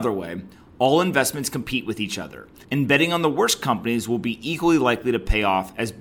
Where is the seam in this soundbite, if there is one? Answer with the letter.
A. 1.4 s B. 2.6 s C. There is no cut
B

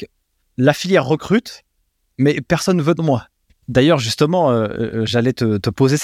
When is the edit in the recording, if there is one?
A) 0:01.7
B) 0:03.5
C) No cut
B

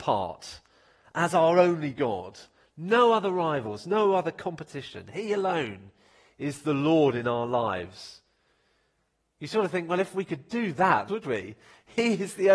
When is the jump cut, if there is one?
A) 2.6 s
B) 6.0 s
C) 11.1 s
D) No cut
C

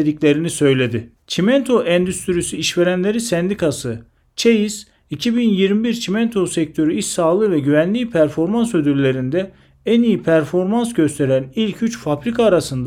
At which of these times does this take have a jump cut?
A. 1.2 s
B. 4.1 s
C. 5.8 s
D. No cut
A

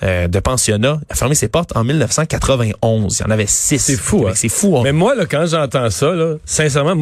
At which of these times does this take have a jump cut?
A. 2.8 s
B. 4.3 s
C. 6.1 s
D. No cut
D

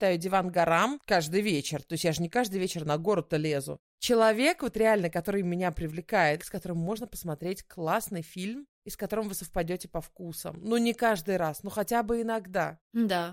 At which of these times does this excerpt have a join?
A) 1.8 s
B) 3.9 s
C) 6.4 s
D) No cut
C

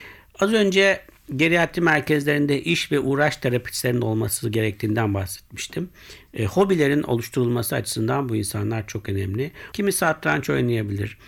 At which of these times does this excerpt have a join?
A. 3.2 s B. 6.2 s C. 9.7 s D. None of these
C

